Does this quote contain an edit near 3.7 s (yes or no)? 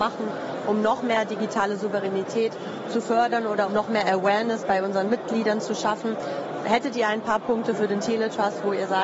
yes